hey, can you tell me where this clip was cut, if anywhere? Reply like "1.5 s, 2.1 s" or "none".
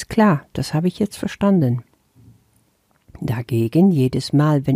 none